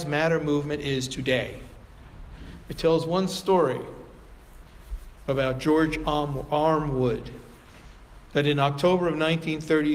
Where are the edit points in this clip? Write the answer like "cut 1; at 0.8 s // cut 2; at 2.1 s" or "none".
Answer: cut 1; at 2.7 s